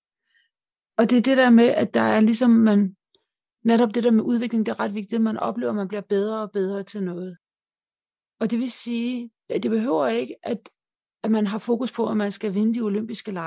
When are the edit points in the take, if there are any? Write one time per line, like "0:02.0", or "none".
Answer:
none